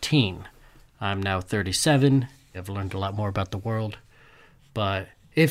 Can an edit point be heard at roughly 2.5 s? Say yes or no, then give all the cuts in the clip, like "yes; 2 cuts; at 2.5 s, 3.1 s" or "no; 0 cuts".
yes; 1 cut; at 2.5 s